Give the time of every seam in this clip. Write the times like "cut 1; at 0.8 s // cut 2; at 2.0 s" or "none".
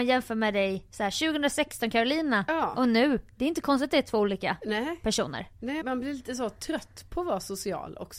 cut 1; at 5.8 s